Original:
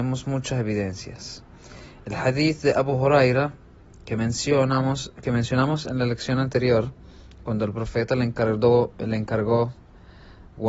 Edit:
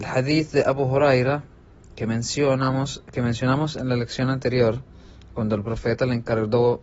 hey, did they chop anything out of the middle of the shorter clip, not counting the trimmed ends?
no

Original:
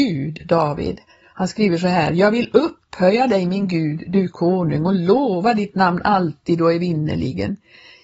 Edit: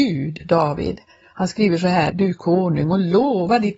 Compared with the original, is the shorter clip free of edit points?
no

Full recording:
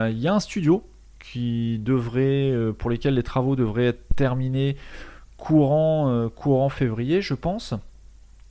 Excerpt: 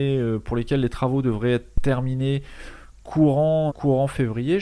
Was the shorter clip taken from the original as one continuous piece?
no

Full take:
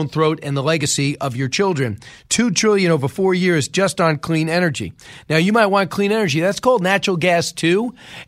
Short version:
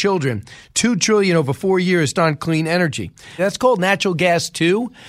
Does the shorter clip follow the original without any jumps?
no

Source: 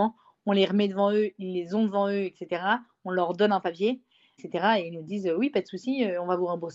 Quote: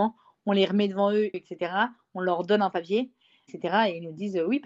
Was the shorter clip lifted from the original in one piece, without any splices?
no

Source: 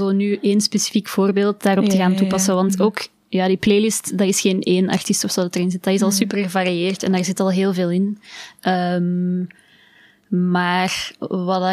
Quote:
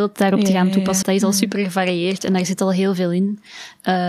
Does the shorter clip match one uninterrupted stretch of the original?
no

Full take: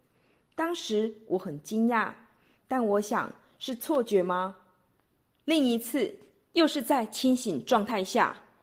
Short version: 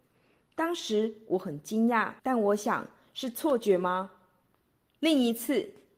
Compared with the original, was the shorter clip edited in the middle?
yes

